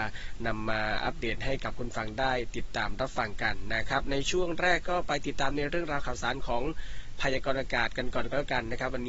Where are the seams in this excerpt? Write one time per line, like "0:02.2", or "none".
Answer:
none